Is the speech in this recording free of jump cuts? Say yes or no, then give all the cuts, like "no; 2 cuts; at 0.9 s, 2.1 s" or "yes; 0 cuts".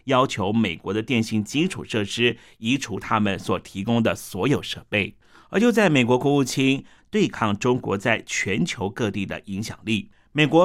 no; 1 cut; at 7.0 s